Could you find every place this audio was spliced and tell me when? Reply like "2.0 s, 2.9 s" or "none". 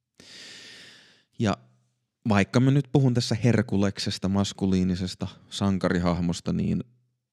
none